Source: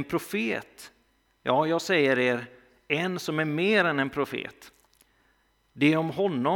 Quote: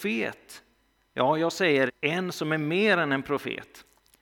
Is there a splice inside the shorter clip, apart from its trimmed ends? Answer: yes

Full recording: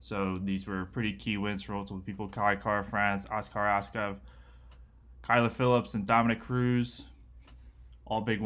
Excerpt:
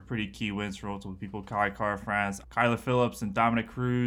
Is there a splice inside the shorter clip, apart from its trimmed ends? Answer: yes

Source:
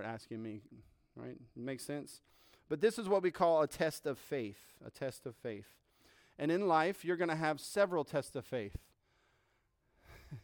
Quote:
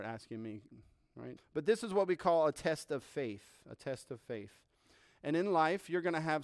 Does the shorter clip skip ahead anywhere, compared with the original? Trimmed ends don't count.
yes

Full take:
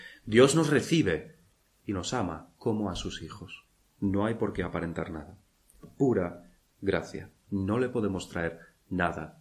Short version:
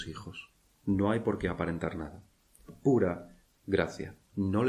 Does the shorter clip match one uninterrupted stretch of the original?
yes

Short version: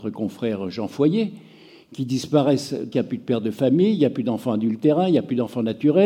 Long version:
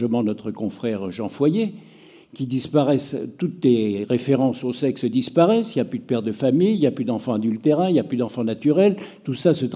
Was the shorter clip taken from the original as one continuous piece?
no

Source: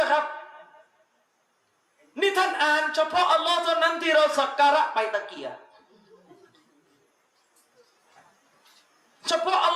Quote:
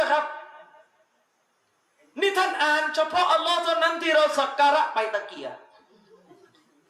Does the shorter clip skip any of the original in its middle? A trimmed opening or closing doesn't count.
no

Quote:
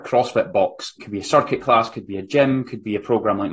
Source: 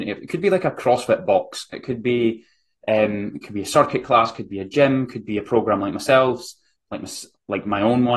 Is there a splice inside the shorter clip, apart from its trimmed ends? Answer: yes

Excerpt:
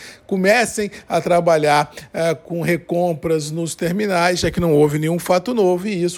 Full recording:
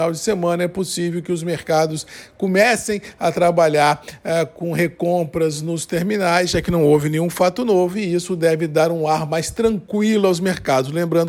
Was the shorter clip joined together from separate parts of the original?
no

